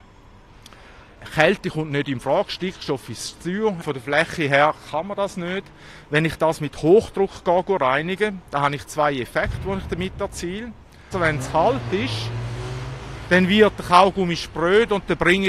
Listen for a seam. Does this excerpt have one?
yes; 2 cuts; at 3.8 s, 11.1 s

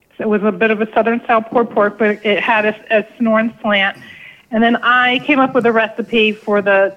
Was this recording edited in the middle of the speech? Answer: no; 0 cuts

